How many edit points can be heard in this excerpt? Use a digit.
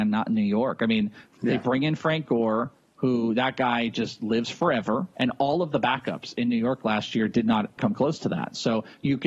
2